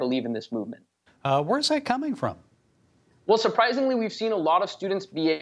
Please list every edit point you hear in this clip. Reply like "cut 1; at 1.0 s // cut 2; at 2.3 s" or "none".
cut 1; at 1.1 s